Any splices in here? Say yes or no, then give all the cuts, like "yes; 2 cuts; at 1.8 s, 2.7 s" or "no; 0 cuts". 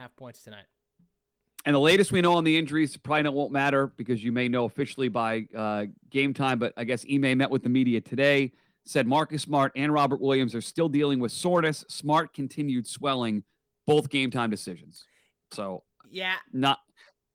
no; 0 cuts